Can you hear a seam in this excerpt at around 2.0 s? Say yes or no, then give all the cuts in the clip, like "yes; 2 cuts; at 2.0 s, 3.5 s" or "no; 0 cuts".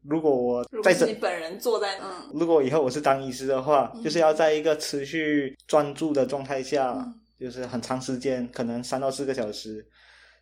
yes; 1 cut; at 2.0 s